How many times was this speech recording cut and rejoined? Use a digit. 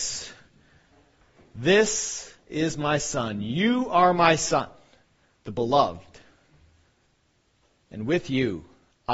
0